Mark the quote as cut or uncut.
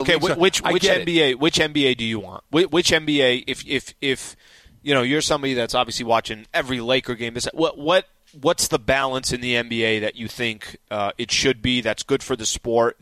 uncut